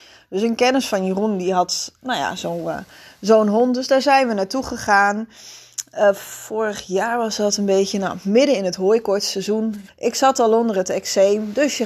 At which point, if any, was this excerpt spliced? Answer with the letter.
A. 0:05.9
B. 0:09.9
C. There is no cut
B